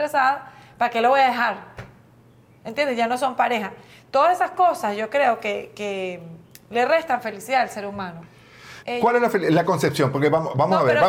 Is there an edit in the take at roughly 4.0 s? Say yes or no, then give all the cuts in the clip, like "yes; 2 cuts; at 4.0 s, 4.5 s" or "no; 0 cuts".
no; 1 cut; at 8.8 s